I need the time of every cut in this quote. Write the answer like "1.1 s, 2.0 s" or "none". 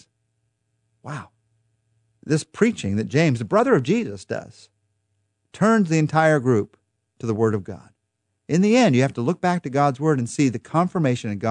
none

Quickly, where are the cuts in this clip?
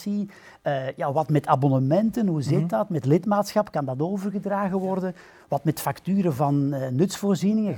none

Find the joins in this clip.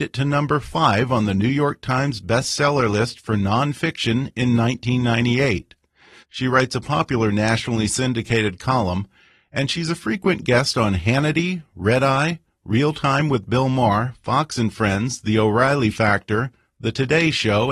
6.2 s

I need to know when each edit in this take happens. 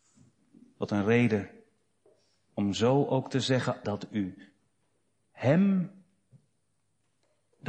3.8 s

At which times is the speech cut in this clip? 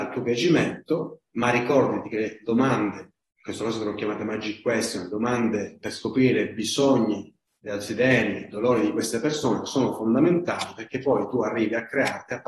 none

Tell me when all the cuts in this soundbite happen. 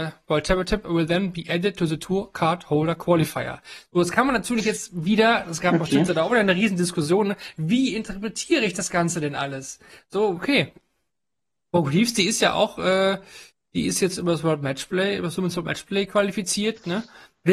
10.4 s

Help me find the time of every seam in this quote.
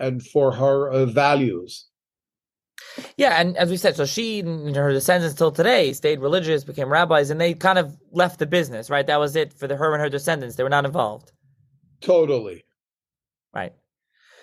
none

